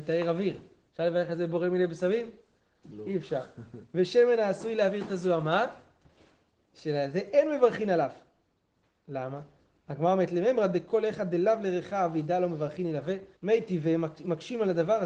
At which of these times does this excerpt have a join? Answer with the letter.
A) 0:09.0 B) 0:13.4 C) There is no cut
B